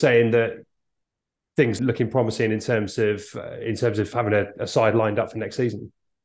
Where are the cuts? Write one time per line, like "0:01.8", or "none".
0:01.8